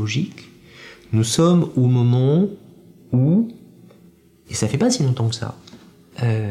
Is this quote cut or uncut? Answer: uncut